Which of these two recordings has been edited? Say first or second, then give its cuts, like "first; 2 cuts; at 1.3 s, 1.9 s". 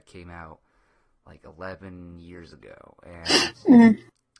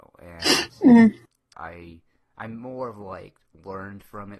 second; 1 cut; at 1.5 s